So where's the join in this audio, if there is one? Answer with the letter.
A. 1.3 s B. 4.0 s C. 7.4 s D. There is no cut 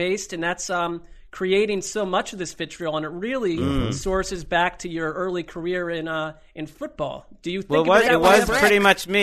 D